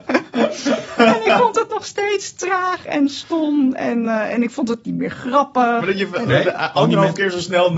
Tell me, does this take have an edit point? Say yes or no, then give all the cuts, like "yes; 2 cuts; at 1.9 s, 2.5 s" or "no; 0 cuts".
no; 0 cuts